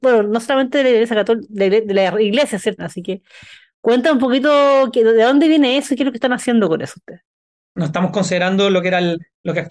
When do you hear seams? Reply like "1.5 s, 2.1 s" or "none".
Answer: 2.8 s, 7.6 s